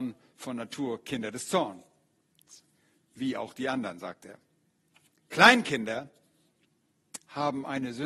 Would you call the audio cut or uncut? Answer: uncut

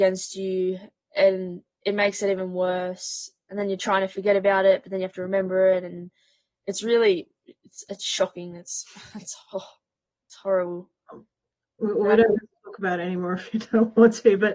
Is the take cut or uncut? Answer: uncut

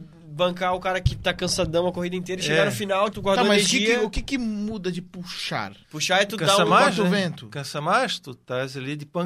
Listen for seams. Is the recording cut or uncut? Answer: cut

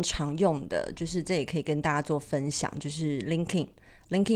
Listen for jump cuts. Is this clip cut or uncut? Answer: uncut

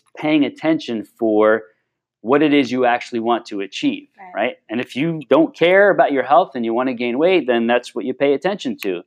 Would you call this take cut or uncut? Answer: uncut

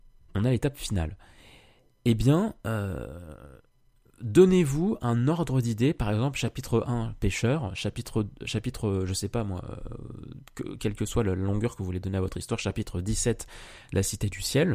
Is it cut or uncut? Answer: uncut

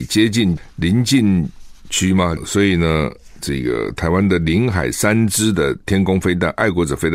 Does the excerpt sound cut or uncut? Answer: cut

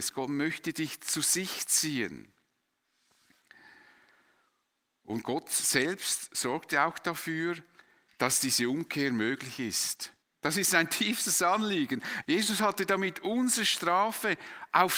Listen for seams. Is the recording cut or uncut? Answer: cut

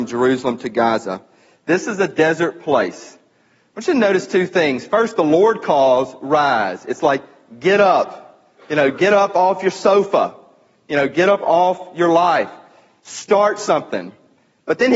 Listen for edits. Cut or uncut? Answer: uncut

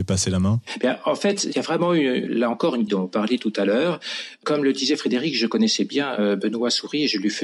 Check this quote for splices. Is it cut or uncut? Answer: cut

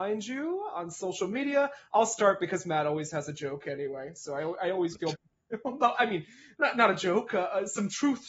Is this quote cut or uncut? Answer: cut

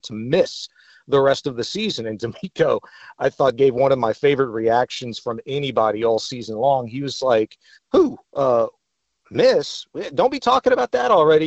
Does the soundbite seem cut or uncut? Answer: cut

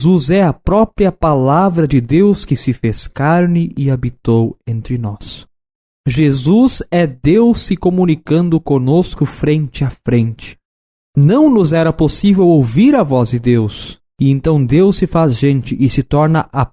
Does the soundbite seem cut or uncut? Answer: uncut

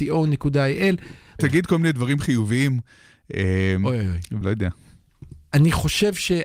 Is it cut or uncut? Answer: cut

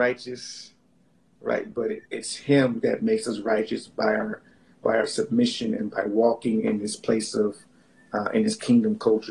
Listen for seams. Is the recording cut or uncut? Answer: uncut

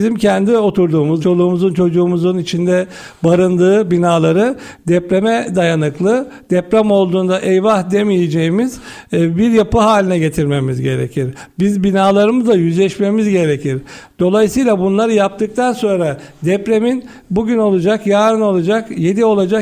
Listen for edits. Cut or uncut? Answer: cut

